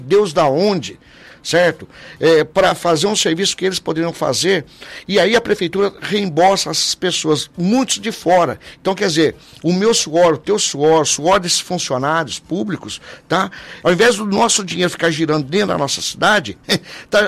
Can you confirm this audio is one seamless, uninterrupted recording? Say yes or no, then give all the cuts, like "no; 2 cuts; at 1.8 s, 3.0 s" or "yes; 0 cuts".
no; 1 cut; at 13.8 s